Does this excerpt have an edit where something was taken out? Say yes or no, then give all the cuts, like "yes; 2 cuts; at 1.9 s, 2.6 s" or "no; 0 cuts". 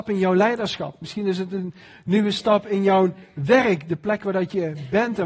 no; 0 cuts